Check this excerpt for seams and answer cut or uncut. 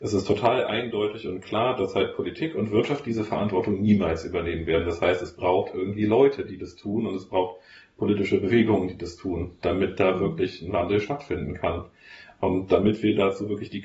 uncut